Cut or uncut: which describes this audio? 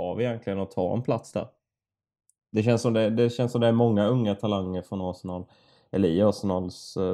uncut